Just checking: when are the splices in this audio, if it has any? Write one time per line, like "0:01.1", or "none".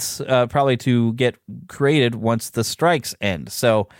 none